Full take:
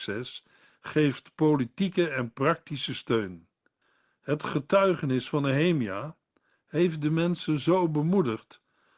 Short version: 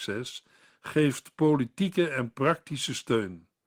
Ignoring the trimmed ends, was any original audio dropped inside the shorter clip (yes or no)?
no